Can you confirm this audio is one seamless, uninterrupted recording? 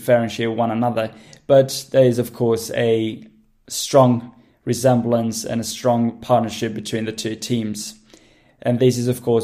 yes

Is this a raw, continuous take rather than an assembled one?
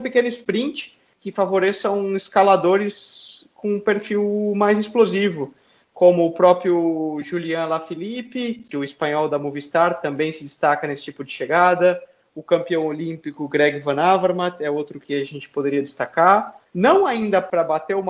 no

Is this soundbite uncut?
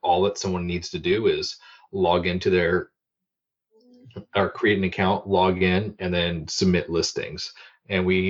yes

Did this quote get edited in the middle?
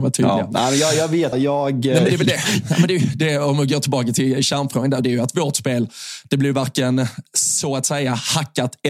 yes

